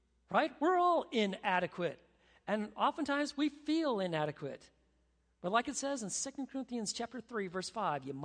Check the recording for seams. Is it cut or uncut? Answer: uncut